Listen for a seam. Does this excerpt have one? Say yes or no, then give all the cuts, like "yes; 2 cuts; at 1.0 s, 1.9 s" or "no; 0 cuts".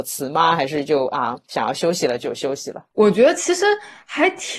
yes; 1 cut; at 2.9 s